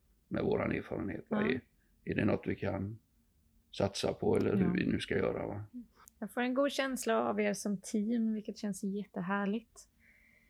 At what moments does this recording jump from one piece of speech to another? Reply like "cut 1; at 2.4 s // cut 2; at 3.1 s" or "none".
none